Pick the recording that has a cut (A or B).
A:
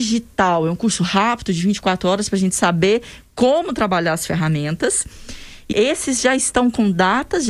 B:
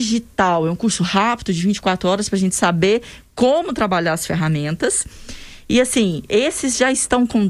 A